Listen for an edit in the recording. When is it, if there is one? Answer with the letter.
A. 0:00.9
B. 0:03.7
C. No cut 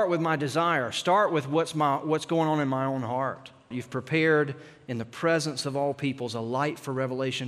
B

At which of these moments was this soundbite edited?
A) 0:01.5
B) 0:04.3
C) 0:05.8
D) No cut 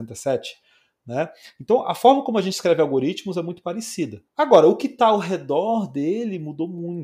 B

